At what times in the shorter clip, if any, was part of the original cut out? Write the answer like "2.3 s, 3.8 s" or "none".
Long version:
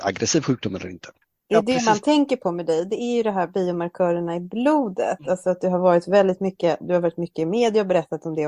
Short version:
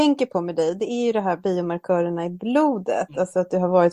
none